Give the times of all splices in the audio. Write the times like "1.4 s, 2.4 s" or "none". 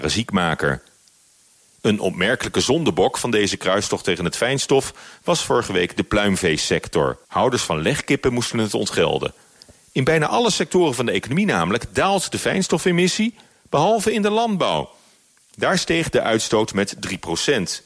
7.2 s